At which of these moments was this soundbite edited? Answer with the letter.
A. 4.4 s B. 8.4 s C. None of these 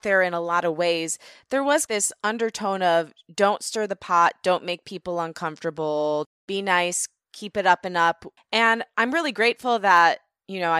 B